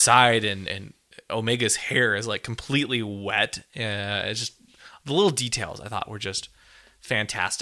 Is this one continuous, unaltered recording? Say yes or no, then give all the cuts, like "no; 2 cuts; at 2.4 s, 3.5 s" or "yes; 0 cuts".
yes; 0 cuts